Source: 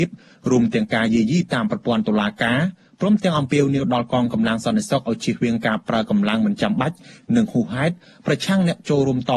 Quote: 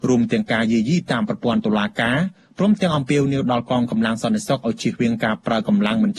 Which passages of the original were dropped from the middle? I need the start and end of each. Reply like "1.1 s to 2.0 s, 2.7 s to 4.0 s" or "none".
none